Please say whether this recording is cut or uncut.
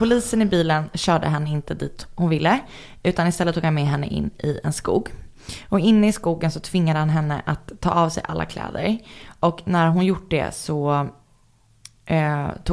uncut